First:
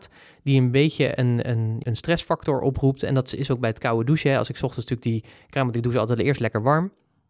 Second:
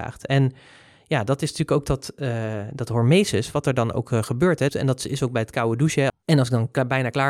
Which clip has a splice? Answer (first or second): second